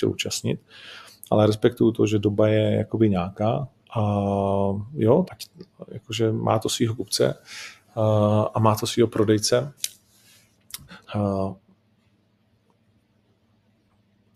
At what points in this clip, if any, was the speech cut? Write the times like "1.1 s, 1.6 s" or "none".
3.8 s, 5.3 s, 11.0 s